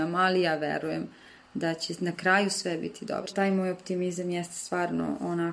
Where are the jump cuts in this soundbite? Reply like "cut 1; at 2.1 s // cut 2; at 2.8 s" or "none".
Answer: cut 1; at 3.3 s